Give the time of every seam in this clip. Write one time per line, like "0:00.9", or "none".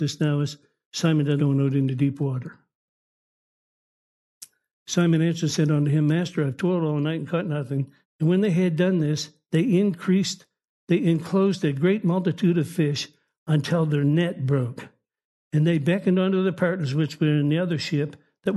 0:01.4
0:08.0